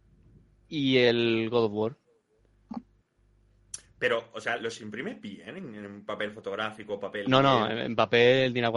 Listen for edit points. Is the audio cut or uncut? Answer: uncut